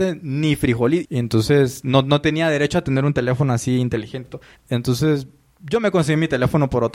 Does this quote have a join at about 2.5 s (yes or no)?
no